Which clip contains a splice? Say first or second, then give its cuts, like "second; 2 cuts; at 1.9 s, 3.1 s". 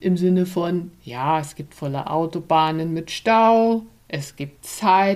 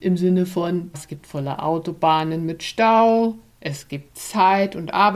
second; 1 cut; at 0.9 s